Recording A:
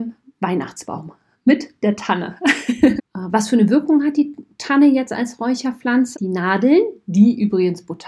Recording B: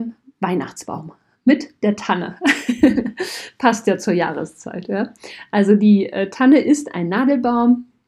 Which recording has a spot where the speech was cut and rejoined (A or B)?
A